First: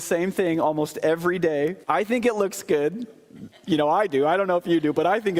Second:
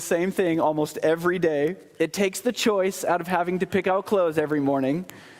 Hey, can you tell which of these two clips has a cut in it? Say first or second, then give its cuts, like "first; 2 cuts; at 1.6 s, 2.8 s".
first; 1 cut; at 1.8 s